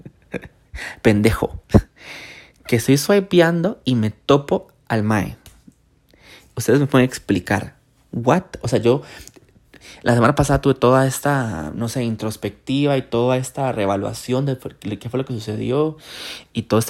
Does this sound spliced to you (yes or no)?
no